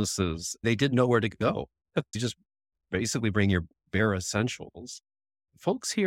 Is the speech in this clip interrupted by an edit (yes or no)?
yes